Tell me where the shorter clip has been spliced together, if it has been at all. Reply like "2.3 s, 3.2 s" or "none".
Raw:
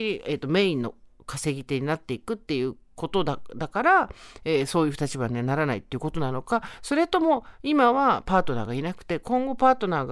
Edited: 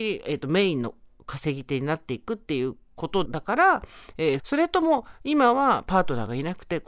3.3 s, 4.4 s